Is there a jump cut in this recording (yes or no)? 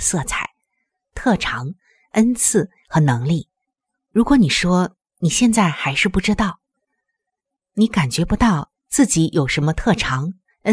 yes